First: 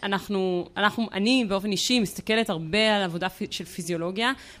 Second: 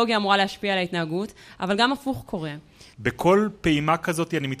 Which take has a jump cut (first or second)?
second